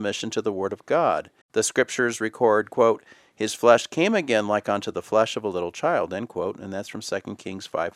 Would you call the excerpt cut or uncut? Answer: cut